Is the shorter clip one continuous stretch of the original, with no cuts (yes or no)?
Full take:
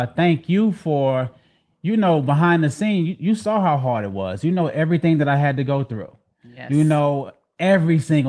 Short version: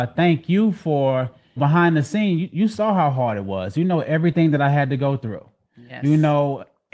no